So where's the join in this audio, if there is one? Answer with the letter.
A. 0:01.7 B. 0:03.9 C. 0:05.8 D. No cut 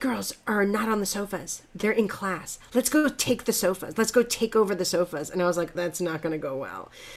C